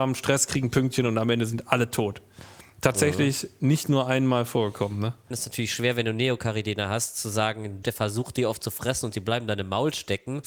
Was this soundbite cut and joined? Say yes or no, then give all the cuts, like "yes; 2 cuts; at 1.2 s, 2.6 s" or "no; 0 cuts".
yes; 2 cuts; at 5.3 s, 7.8 s